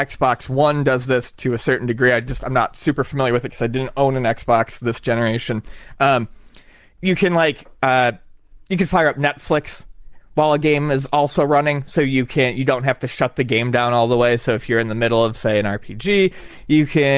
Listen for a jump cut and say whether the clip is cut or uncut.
uncut